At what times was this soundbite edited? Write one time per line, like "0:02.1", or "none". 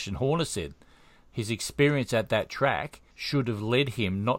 0:03.1